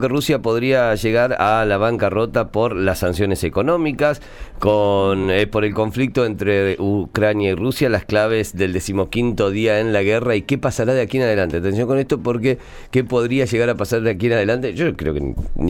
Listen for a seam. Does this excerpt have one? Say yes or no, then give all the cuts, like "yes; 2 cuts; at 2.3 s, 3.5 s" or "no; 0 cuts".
no; 0 cuts